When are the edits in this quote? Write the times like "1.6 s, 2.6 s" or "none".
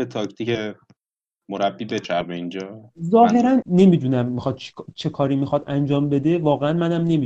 3.6 s